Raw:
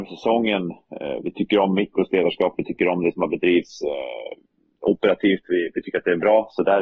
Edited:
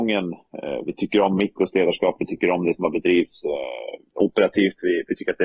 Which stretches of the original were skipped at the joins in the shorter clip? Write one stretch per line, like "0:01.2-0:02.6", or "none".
0:04.4-0:04.7